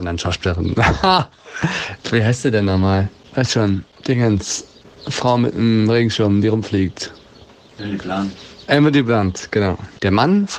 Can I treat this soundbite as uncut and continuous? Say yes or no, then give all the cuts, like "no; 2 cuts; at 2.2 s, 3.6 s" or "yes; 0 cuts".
yes; 0 cuts